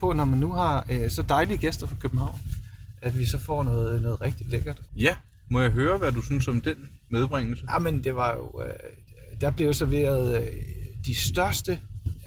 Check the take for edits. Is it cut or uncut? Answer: cut